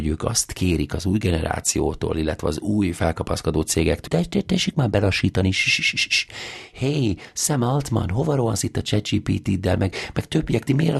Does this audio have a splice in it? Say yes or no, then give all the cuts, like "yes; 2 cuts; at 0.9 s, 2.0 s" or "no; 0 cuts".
yes; 1 cut; at 4.1 s